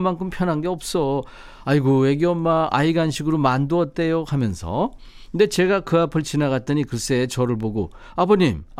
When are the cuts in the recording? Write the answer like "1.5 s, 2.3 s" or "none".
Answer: none